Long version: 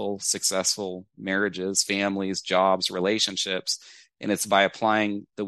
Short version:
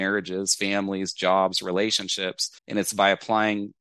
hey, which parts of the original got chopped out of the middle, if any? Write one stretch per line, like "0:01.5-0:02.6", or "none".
0:03.9-0:04.1